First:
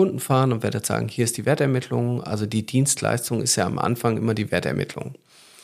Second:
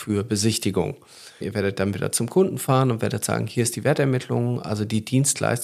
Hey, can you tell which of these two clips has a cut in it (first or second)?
second